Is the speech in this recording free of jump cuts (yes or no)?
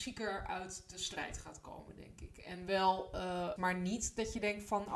no